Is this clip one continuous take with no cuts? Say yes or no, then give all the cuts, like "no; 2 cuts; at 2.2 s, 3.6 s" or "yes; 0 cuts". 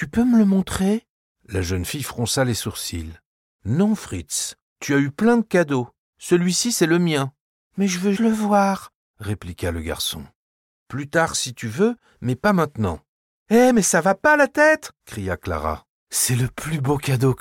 no; 3 cuts; at 8.1 s, 13.3 s, 16.0 s